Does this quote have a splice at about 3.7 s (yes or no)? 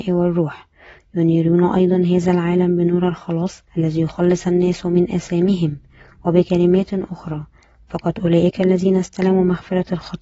yes